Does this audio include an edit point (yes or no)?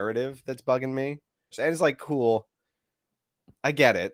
yes